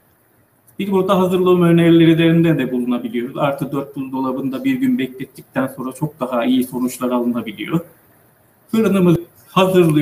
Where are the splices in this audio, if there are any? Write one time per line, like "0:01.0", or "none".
none